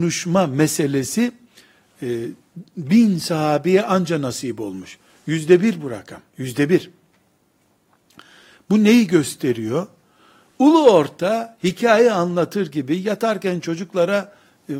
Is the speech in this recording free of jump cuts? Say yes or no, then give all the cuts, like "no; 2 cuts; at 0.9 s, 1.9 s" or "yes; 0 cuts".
no; 1 cut; at 6.3 s